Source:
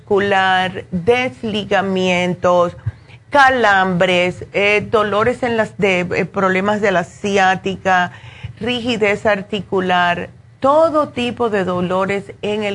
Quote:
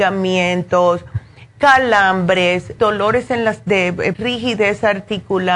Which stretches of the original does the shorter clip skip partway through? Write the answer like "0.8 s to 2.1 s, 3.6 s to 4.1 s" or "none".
4.5 s to 4.9 s, 6.3 s to 8.6 s